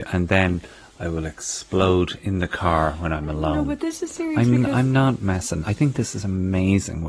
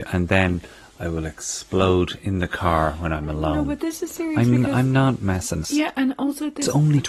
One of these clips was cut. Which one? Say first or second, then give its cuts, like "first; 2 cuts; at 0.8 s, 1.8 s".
second; 1 cut; at 5.6 s